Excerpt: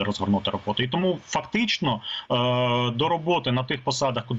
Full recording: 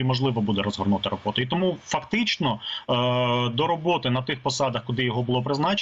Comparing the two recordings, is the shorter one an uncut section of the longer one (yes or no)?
yes